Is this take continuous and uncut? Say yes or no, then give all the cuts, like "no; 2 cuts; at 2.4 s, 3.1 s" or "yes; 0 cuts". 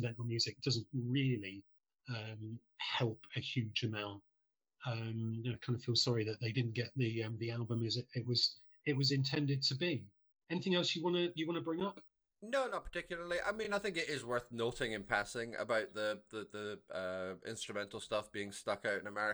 yes; 0 cuts